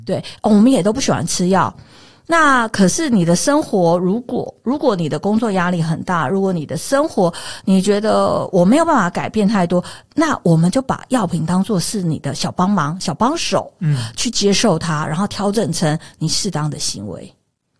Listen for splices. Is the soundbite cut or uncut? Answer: uncut